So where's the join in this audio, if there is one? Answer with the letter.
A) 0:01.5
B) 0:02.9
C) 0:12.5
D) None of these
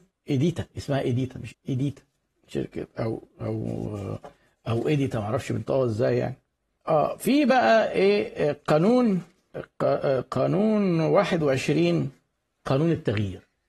A